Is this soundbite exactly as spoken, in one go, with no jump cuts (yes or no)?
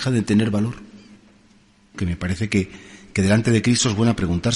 no